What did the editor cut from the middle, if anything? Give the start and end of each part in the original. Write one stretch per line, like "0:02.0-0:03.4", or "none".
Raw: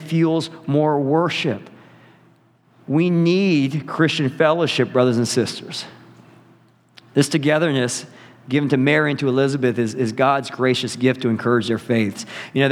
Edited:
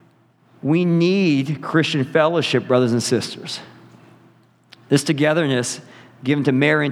none